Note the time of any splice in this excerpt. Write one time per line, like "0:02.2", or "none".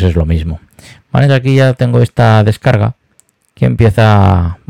0:01.3

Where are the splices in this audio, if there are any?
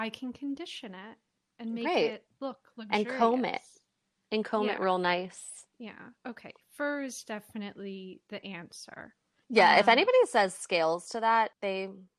0:05.7

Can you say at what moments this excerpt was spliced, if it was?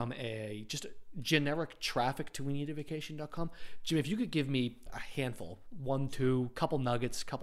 0:04.9

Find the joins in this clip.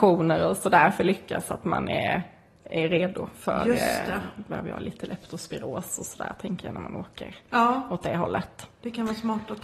none

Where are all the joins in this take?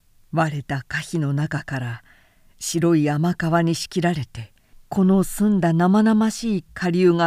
none

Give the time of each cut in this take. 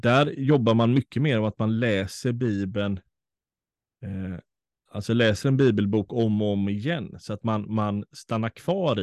none

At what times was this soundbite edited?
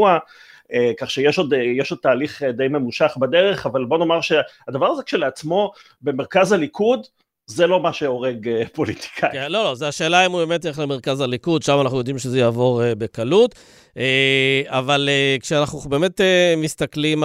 none

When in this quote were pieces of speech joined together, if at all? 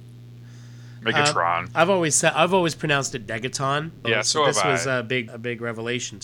0:04.0
0:05.3

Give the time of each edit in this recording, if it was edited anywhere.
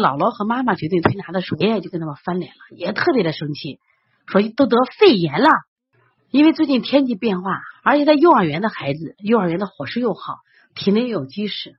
0:01.6
0:06.2
0:07.7

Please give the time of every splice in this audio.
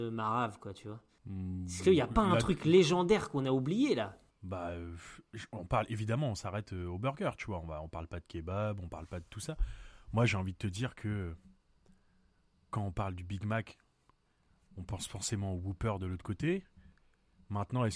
none

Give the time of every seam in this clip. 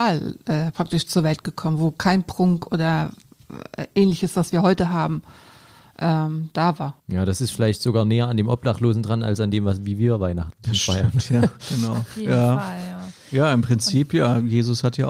0:07.0

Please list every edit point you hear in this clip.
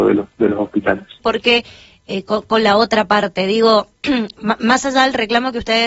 0:01.2

